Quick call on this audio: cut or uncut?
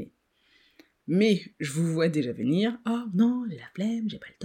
uncut